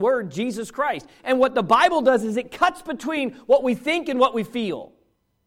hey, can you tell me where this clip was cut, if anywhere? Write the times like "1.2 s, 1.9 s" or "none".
1.2 s